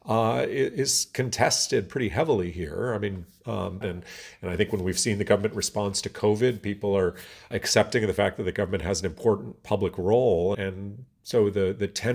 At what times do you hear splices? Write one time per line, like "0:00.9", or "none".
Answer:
0:03.8
0:07.5
0:10.5